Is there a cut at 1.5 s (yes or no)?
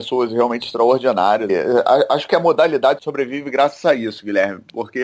yes